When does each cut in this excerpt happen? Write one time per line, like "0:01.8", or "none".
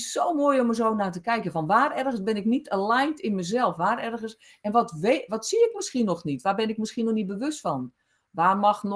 none